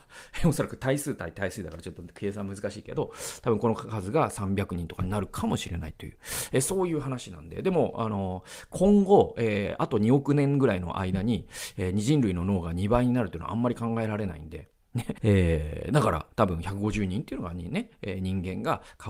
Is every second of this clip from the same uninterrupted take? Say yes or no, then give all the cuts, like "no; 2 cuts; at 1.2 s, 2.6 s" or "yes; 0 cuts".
no; 1 cut; at 15.2 s